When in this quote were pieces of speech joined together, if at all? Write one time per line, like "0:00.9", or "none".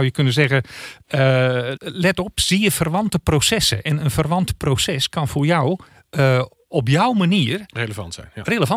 0:01.8